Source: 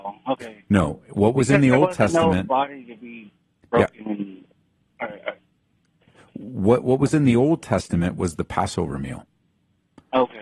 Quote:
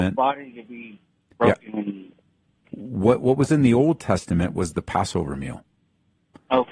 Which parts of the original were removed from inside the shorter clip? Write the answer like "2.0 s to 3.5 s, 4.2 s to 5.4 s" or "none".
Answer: 5.0 s to 6.3 s